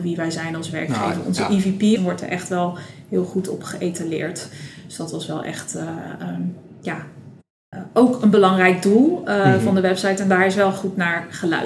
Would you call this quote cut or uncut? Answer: cut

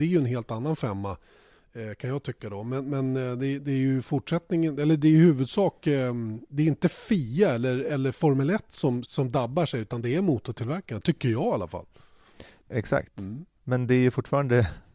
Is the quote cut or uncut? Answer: cut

